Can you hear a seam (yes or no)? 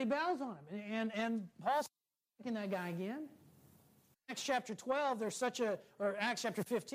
yes